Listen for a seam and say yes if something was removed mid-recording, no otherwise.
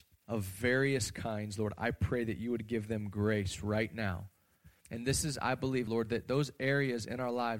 yes